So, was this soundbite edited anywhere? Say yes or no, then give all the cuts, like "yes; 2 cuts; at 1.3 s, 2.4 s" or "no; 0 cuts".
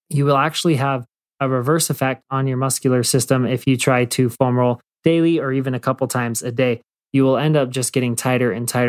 no; 0 cuts